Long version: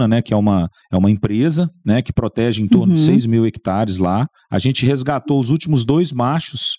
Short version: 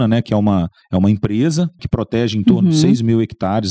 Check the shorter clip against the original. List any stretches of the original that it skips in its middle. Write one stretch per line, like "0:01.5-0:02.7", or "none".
0:01.8-0:02.0

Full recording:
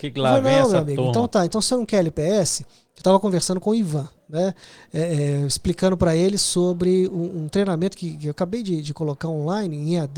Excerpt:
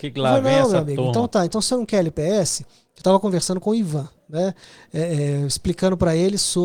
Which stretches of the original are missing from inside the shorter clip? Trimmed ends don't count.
none

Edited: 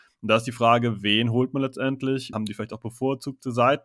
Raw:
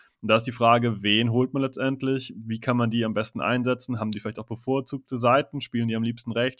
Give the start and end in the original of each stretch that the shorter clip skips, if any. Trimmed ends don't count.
0:02.3-0:04.0

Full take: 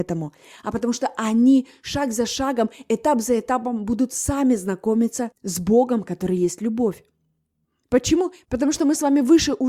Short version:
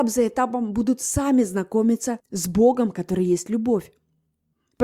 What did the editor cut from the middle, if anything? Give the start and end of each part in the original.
none

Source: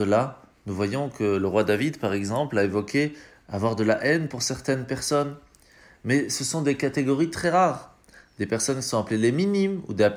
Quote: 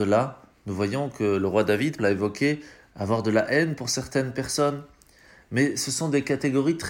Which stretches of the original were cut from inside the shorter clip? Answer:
0:02.0-0:02.5

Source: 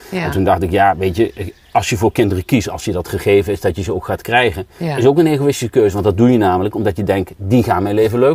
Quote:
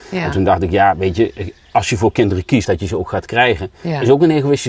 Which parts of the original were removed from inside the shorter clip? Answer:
0:02.6-0:03.6

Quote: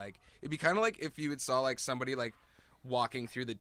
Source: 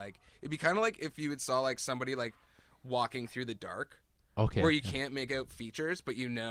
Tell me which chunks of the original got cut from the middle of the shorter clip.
none

